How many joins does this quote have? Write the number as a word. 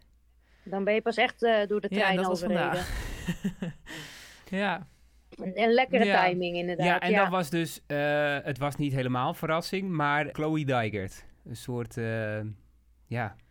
one